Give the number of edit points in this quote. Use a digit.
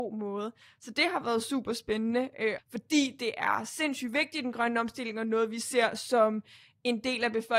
1